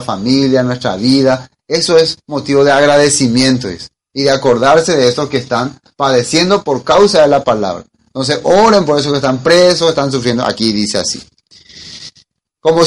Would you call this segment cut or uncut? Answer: uncut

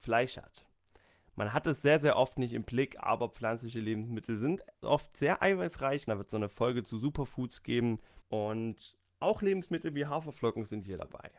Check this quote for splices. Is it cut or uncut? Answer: cut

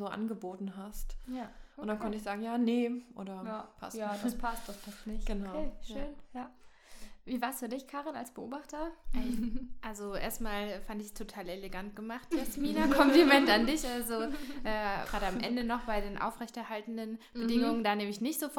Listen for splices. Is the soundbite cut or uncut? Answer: cut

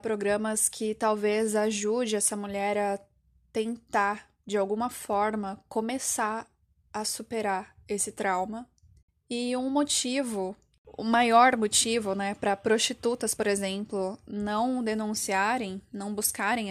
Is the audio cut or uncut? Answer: uncut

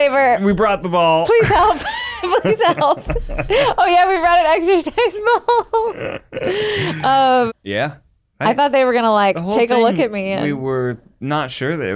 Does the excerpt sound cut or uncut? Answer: cut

